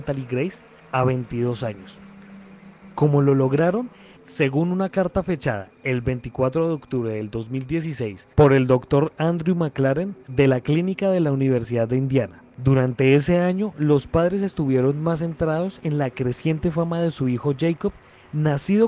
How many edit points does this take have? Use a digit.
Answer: 3